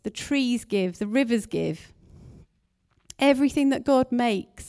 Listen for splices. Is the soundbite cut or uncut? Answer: uncut